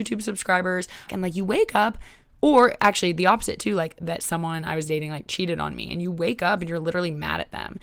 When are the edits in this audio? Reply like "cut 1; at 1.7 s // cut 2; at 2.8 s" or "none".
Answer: cut 1; at 1.1 s